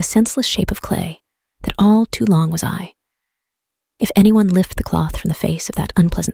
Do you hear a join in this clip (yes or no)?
no